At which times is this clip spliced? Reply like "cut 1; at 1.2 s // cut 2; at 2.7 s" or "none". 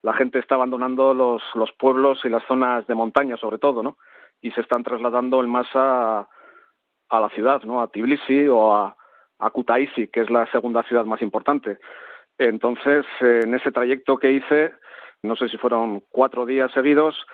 cut 1; at 15.2 s